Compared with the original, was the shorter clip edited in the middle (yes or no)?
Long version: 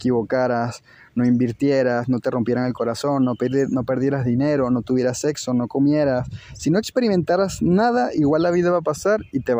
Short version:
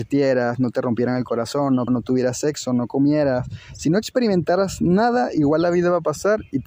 yes